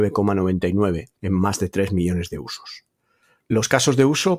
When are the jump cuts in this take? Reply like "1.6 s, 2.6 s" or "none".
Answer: 1.2 s